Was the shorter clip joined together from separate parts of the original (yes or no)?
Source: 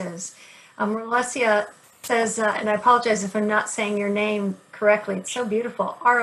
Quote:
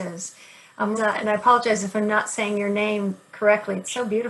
yes